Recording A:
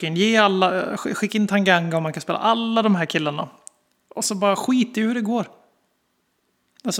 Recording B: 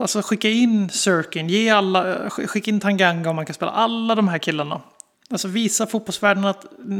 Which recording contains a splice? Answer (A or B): B